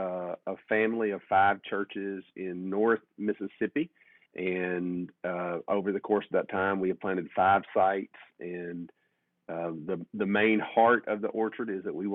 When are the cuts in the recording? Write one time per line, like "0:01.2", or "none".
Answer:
0:04.3